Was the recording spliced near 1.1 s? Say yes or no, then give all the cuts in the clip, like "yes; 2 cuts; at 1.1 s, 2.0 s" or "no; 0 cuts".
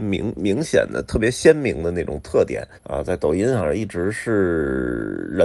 no; 1 cut; at 2.8 s